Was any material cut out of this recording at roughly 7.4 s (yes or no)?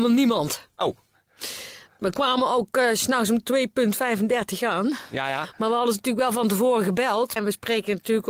yes